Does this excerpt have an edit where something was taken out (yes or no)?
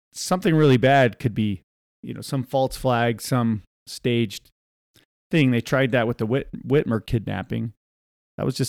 no